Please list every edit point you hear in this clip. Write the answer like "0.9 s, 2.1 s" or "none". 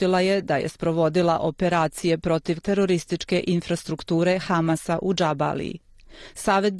2.6 s